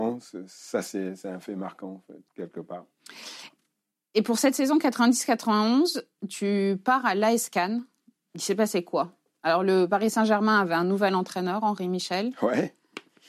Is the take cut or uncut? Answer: cut